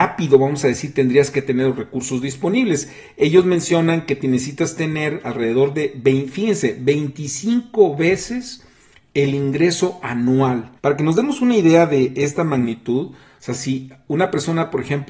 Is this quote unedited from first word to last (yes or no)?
no